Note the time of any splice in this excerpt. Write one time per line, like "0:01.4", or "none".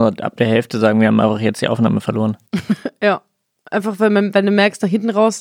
none